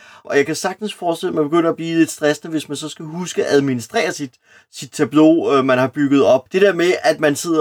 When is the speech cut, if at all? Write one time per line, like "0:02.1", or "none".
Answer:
0:06.5